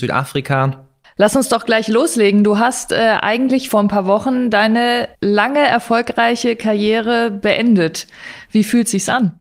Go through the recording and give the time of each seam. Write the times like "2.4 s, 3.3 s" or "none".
1.0 s, 5.1 s

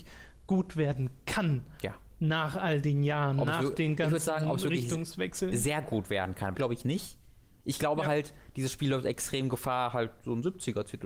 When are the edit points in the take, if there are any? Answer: 6.5 s

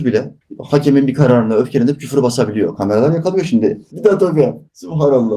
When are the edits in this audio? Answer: 3.9 s

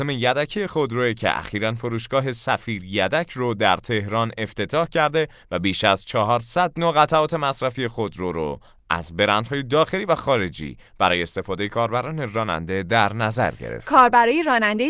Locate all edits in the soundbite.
none

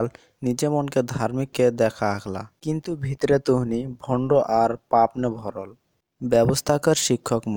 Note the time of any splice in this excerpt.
1.5 s

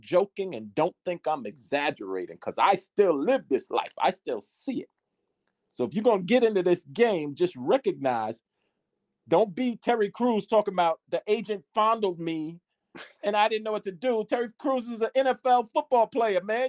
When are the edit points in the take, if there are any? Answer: 11.0 s

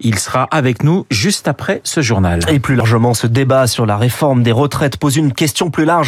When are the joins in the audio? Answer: none

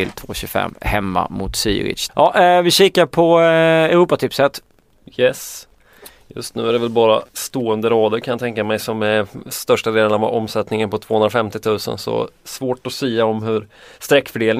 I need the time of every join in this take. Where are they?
2.1 s

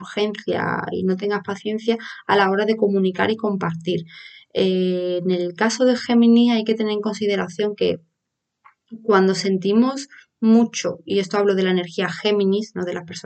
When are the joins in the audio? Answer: none

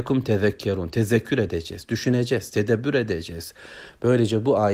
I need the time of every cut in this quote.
2.5 s

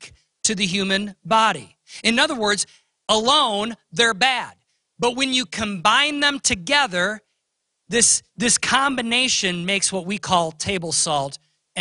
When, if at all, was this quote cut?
none

